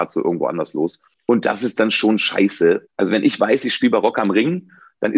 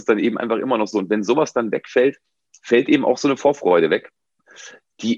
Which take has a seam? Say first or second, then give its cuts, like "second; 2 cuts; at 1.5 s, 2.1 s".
first; 2 cuts; at 1.1 s, 2.8 s